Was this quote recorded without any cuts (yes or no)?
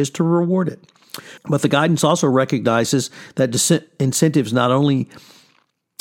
no